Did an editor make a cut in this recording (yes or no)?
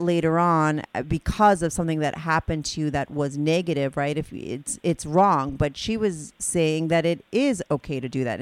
no